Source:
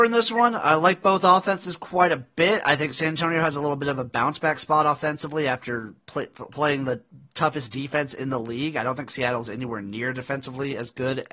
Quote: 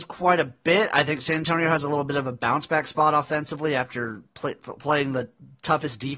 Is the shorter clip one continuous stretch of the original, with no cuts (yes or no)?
yes